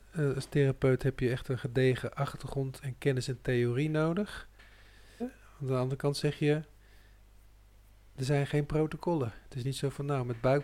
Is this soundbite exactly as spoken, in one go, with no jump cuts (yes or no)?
no